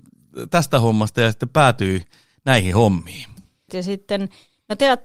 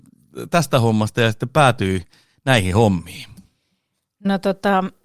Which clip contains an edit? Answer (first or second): first